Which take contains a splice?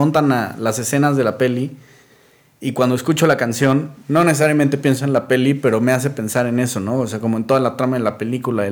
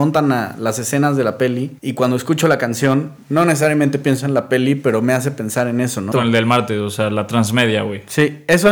second; 2 cuts; at 1.8 s, 6.1 s

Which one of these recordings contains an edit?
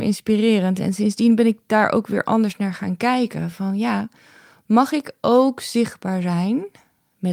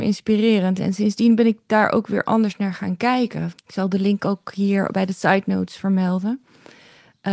second; 1 cut; at 3.5 s

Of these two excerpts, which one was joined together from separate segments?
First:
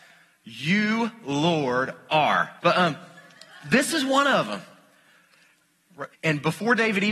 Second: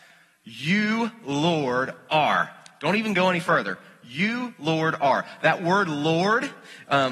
first; 2 cuts; at 2.6 s, 6.1 s

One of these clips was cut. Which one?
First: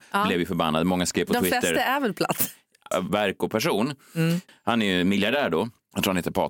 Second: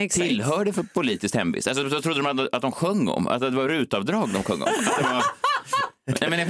first; 2 cuts; at 2.9 s, 4.5 s

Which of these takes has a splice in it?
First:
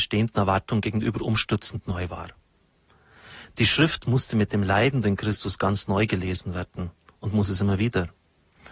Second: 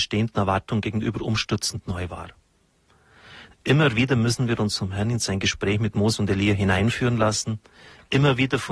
second; 1 cut; at 3.5 s

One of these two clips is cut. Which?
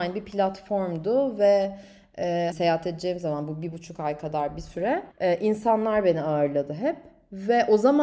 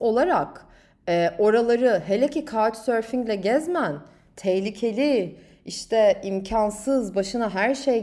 first; 2 cuts; at 2.5 s, 5.1 s

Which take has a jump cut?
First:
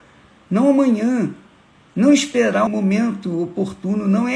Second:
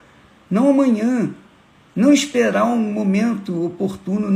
first; 1 cut; at 2.7 s

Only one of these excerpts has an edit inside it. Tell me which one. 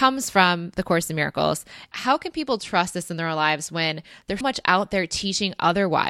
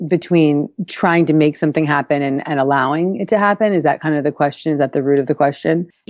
first; 2 cuts; at 1.9 s, 4.4 s

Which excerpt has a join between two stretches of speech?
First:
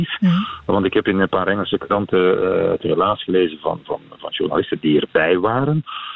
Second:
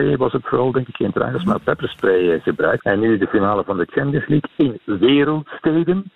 second; 1 cut; at 2.8 s

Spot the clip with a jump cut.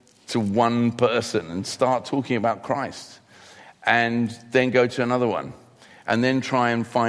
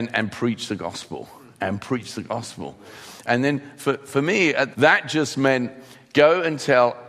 second; 1 cut; at 4.7 s

